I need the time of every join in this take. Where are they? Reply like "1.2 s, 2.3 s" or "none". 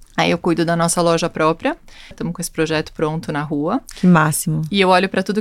2.1 s

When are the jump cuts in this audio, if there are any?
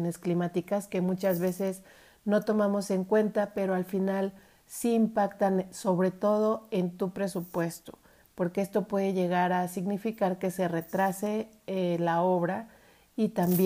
none

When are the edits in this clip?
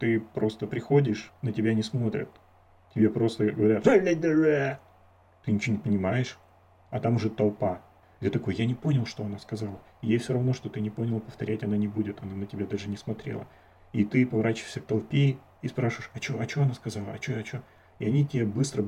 8.0 s

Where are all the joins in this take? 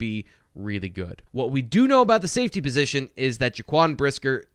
1.3 s

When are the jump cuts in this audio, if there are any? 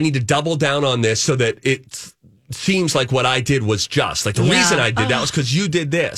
none

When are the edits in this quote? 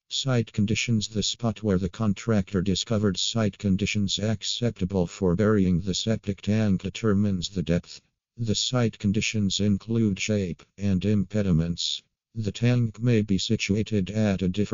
10.7 s

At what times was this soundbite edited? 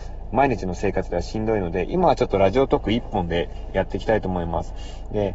none

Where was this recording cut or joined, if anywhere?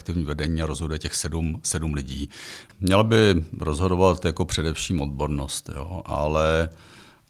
2.7 s

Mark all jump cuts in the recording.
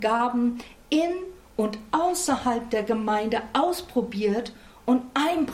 none

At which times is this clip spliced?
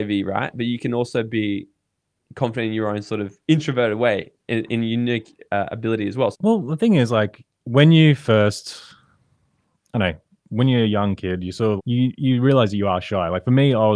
6.3 s, 11.8 s

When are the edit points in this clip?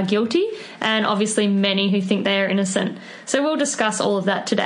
none

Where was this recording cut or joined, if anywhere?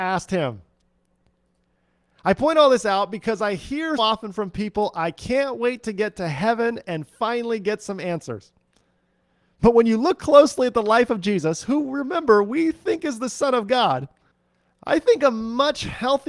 4.0 s

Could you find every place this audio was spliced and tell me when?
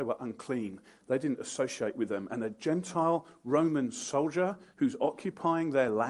1.0 s

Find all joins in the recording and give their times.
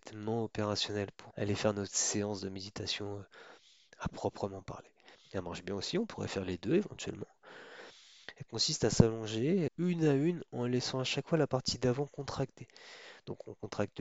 1.3 s, 5.3 s, 9.7 s

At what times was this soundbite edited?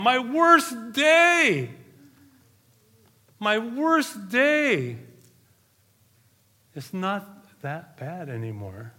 none

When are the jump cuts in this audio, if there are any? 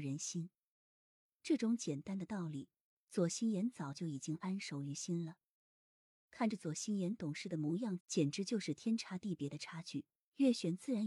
8.0 s

